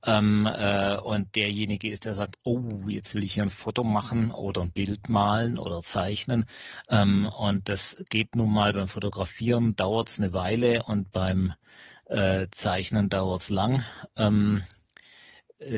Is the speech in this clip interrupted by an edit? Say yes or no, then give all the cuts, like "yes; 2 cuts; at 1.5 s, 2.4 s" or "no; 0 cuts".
no; 0 cuts